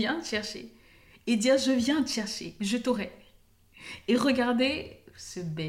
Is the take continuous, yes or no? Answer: yes